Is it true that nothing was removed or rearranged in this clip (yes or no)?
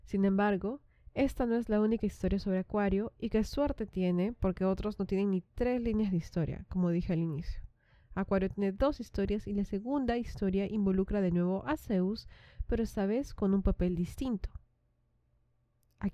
yes